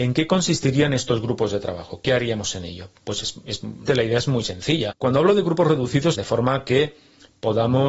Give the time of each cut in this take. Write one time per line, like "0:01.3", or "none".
0:03.9
0:04.9
0:06.1

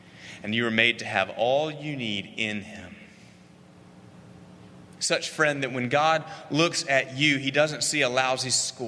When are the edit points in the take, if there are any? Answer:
0:05.0

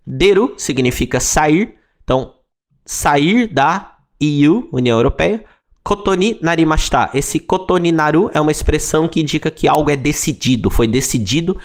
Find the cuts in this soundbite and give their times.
none

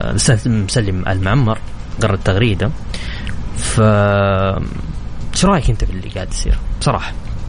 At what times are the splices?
none

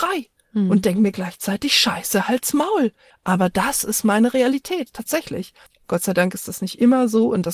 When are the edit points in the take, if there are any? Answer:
0:03.1

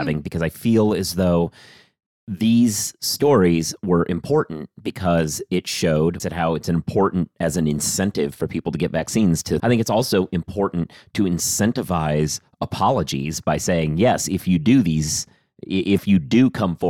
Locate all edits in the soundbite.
0:06.2
0:09.6

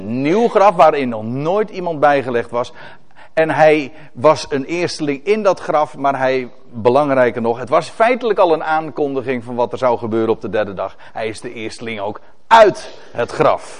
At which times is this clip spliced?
none

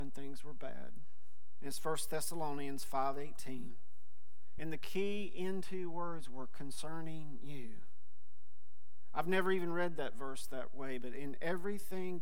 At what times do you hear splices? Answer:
0:04.6

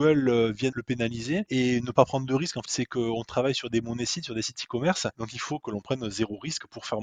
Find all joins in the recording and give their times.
0:02.7

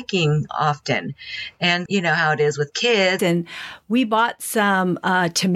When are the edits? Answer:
0:01.9
0:03.2

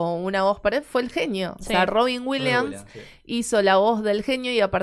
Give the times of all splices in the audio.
none

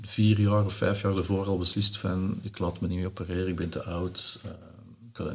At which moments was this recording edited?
none

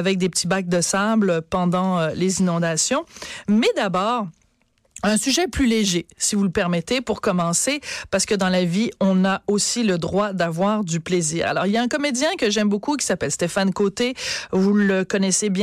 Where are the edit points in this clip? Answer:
none

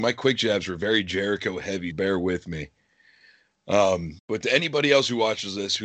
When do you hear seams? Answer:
0:01.9
0:04.2

